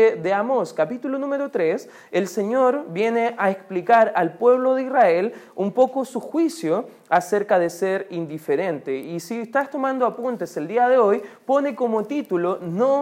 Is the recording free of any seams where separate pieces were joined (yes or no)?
yes